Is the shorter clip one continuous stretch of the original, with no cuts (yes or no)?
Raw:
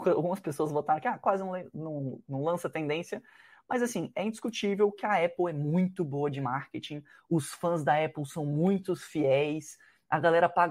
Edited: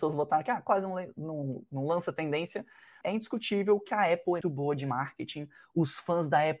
no